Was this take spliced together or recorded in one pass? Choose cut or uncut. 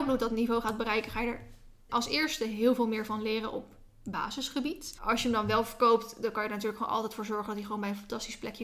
cut